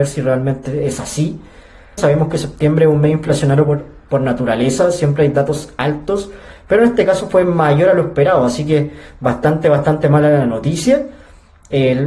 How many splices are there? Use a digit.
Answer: 1